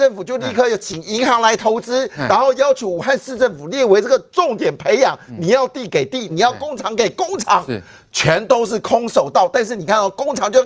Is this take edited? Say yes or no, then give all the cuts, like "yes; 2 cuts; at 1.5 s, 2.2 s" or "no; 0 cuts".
yes; 1 cut; at 6.3 s